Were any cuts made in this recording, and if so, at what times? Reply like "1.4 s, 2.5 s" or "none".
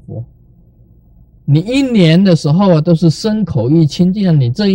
1.4 s